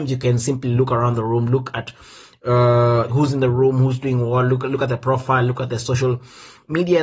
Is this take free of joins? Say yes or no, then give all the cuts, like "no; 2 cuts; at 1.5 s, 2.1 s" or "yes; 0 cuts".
no; 1 cut; at 3.1 s